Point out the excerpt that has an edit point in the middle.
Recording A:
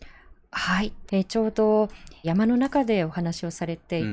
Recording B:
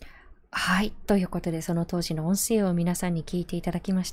A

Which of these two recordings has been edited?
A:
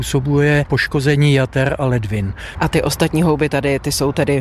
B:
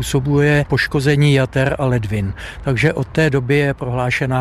A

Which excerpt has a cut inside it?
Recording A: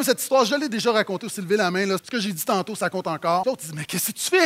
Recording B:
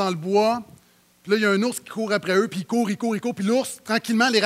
A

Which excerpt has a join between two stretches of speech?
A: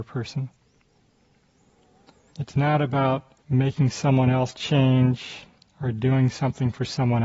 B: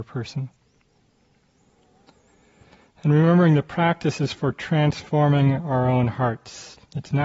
A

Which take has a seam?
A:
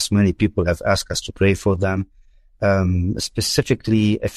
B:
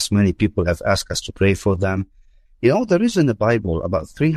B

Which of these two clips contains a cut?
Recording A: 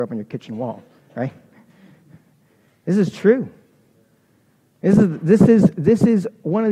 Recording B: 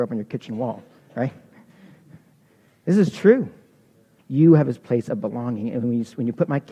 B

